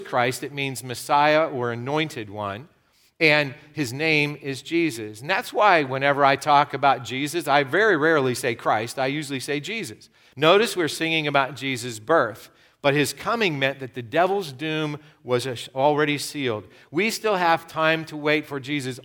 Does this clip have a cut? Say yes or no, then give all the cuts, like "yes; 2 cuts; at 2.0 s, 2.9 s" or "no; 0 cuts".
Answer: yes; 1 cut; at 10.3 s